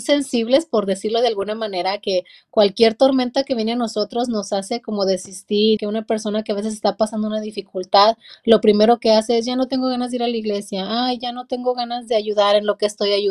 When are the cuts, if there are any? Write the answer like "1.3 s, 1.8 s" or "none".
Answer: 5.8 s